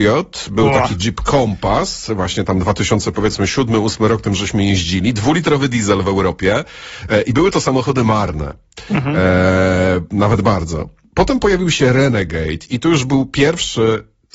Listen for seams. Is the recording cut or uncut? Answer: uncut